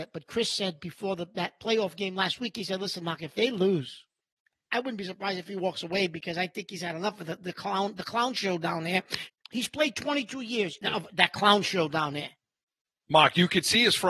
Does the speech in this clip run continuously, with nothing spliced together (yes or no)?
no